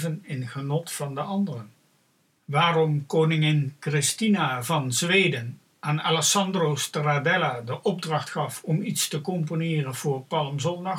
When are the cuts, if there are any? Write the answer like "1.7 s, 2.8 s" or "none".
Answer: 2.4 s

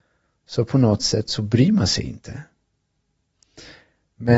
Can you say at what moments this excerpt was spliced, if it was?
none

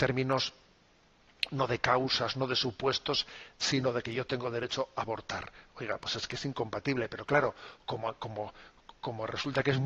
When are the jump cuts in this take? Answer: none

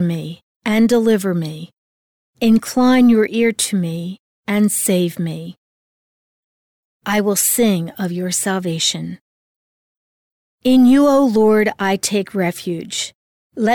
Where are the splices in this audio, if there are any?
10.5 s

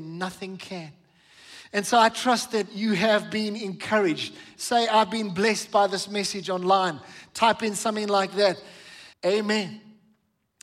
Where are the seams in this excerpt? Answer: 4.6 s, 9.1 s

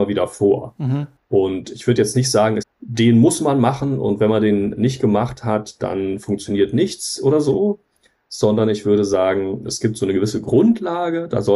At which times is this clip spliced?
2.6 s

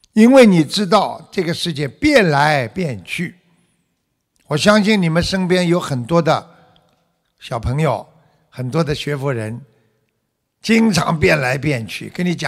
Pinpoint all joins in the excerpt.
none

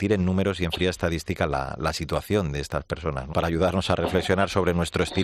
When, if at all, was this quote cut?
3.3 s

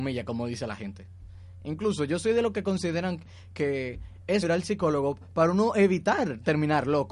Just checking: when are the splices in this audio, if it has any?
4.4 s

